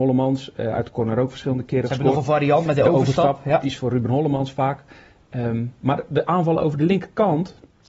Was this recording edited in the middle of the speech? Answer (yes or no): no